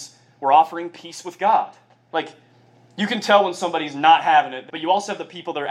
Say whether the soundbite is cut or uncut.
cut